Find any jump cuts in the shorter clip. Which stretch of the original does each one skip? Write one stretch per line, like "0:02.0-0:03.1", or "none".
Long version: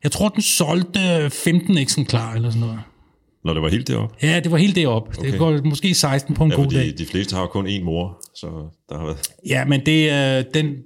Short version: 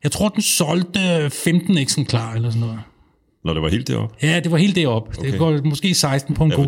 none